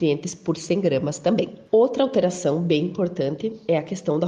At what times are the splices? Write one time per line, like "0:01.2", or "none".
none